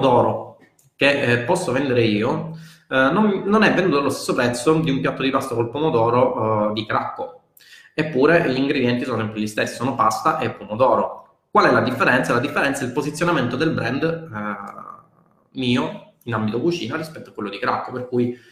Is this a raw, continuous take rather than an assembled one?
yes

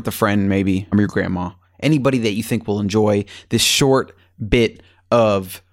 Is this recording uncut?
no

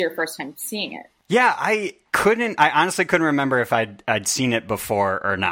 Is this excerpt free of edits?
yes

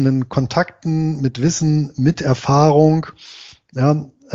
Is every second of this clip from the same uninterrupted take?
yes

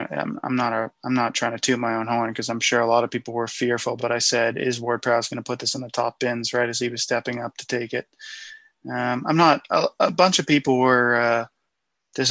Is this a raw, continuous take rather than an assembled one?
yes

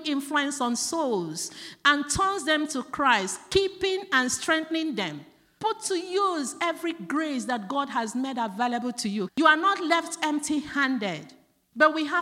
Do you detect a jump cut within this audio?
yes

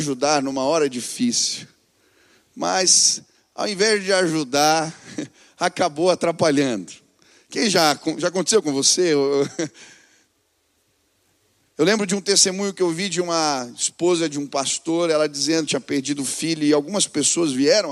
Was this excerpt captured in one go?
yes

